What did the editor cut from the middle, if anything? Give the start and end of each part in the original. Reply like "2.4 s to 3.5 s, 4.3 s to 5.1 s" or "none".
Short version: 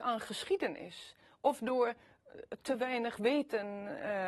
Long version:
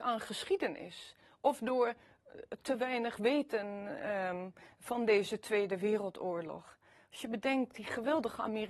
none